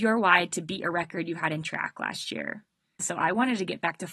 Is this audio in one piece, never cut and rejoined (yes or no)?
no